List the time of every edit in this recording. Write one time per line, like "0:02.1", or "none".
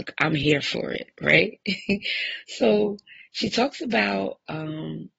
none